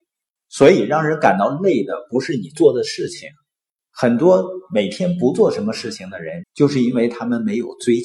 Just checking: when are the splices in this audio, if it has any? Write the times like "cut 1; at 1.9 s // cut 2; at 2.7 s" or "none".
cut 1; at 6.4 s